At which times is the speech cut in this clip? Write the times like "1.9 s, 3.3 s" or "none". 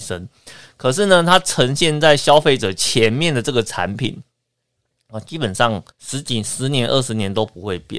5.9 s

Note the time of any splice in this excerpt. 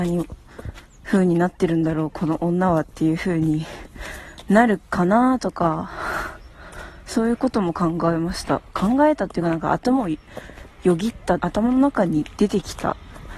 11.4 s

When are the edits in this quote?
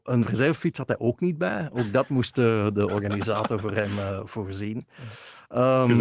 none

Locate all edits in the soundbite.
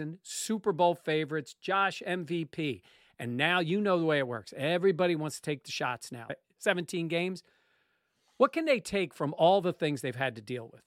6.3 s

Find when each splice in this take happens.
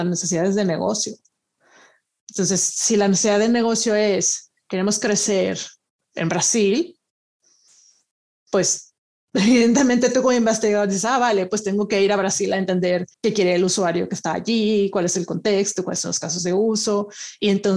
13.1 s

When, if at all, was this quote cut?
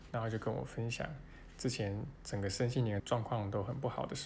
3.0 s

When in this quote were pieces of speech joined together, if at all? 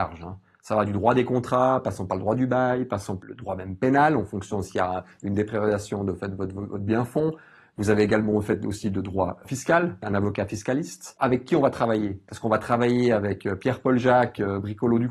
11.2 s

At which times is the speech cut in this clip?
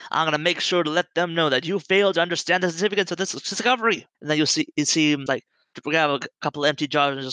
4.1 s, 5.3 s

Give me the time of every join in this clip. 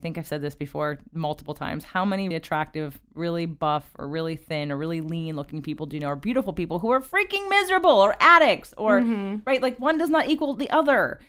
2.3 s

